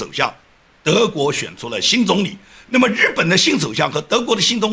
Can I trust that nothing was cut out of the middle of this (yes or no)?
yes